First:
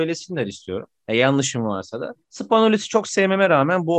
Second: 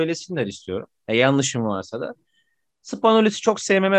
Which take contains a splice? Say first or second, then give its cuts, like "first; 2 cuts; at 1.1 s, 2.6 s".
first; 1 cut; at 2.2 s